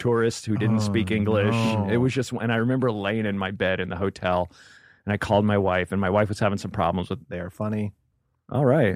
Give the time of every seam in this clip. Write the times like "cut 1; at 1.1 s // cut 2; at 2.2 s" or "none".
cut 1; at 7.2 s